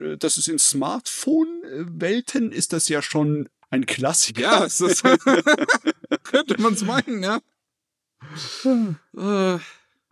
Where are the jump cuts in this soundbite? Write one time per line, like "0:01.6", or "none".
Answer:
0:03.6
0:06.3